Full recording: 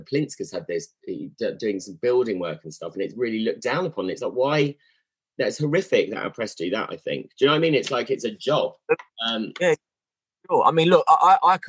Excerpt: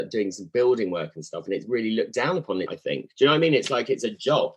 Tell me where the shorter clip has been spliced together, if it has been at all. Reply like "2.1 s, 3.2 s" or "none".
2.7 s